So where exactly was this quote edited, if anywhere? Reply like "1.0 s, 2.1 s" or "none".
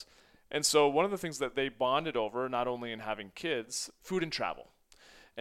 4.0 s